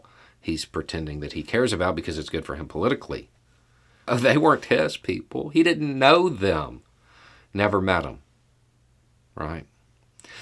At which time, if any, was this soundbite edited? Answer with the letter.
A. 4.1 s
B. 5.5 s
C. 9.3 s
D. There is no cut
A